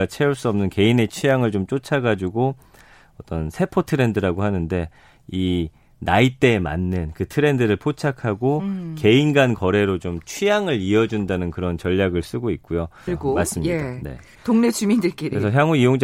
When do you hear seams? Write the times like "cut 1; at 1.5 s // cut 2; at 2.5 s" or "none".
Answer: cut 1; at 13.1 s // cut 2; at 14.4 s